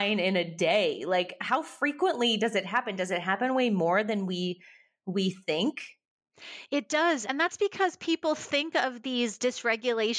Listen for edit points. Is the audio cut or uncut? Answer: uncut